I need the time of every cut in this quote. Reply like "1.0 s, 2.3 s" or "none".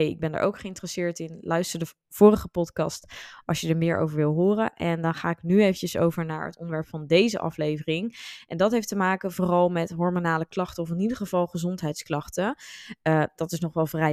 none